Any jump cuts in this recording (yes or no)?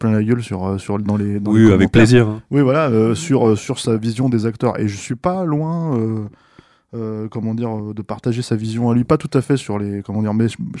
no